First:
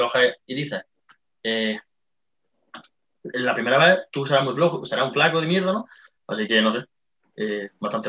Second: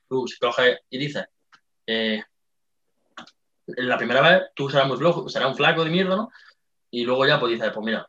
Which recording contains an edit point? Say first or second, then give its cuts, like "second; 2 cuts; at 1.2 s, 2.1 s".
first; 1 cut; at 6.2 s